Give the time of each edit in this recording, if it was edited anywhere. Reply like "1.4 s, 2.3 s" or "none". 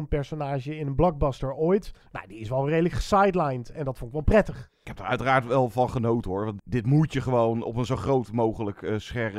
4.7 s, 6.6 s